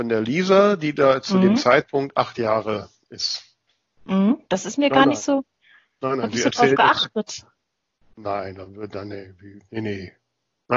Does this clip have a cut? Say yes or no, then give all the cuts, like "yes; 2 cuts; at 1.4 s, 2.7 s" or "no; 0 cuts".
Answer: yes; 1 cut; at 4.5 s